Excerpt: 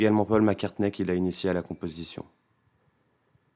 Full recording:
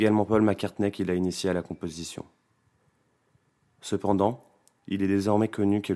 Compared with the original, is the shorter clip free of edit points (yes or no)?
yes